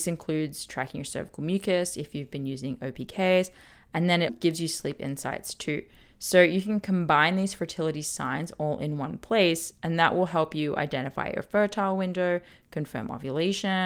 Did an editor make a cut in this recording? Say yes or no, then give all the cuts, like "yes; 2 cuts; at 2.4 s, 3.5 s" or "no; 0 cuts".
yes; 1 cut; at 4.3 s